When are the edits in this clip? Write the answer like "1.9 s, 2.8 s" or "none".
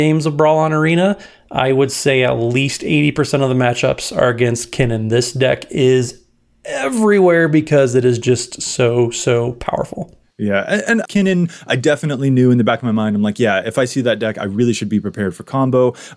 11.1 s